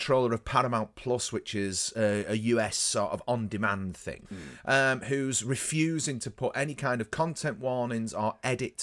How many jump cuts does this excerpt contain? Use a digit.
1